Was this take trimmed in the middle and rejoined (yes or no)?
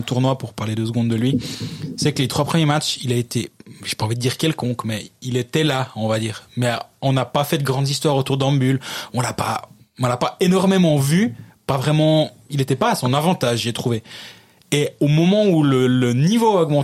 no